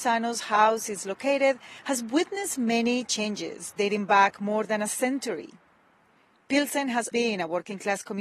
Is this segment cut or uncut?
cut